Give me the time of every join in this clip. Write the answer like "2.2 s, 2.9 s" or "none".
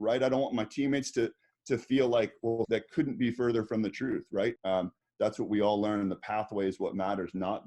2.6 s, 4.6 s